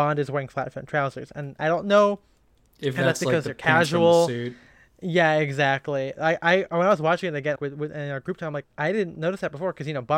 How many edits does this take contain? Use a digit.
3